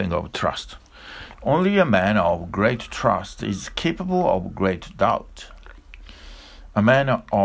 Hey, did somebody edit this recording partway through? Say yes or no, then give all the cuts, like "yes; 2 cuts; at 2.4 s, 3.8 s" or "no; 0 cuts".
yes; 1 cut; at 1.3 s